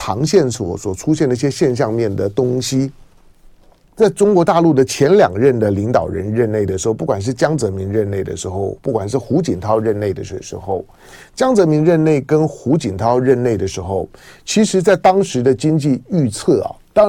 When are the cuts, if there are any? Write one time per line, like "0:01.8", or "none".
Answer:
0:03.8